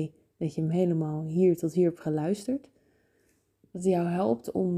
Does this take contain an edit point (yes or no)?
no